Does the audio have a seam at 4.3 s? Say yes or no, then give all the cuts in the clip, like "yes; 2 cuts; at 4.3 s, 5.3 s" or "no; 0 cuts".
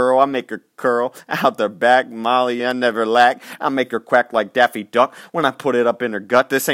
no; 1 cut; at 2.6 s